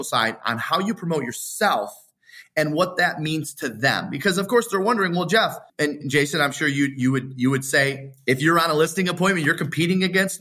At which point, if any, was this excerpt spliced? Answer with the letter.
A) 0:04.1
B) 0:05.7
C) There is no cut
B